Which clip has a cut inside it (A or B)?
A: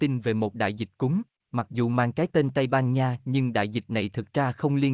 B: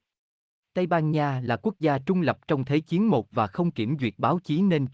A